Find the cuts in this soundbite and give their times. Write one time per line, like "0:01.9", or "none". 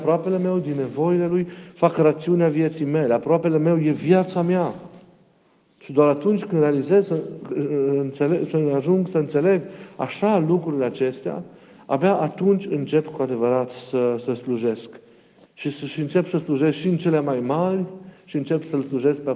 none